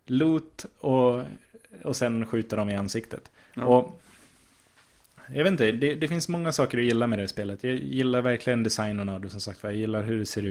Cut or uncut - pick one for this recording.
uncut